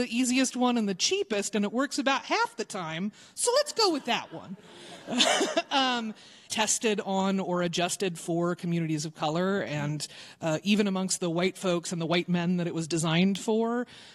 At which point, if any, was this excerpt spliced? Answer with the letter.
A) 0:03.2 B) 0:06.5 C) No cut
B